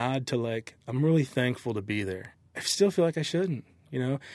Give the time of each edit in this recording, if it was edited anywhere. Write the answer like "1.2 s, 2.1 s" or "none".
none